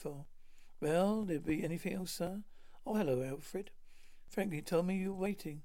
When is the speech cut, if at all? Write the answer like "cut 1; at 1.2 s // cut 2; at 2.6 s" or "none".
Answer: none